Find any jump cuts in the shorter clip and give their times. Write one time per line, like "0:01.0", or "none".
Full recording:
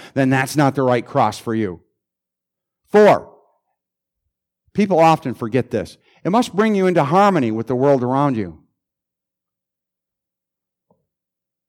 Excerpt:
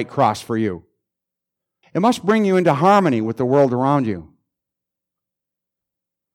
0:01.8